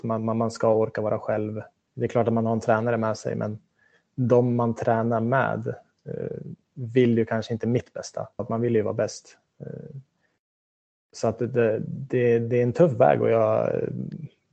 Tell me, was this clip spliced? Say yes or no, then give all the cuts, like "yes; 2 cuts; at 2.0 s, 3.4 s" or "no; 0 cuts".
yes; 1 cut; at 8.4 s